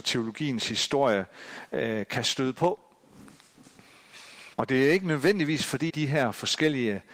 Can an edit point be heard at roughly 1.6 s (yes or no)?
no